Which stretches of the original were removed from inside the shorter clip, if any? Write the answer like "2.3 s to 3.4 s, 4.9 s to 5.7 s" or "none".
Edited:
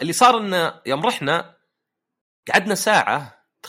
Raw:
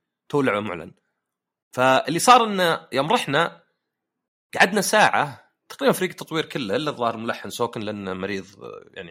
none